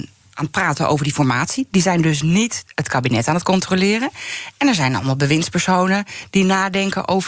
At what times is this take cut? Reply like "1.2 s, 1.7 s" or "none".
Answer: none